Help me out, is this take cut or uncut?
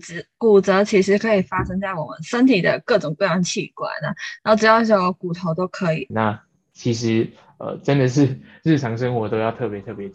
cut